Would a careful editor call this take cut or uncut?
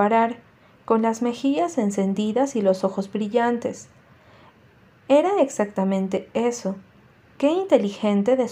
uncut